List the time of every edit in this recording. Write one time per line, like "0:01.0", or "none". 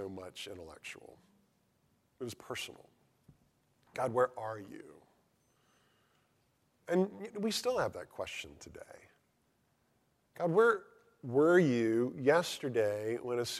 none